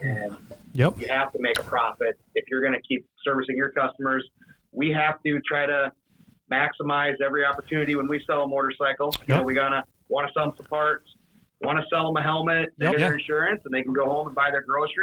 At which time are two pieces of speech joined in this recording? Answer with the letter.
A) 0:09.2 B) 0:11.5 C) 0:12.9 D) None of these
C